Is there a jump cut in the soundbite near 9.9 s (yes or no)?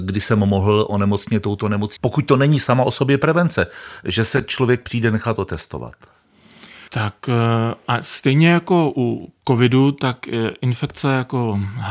no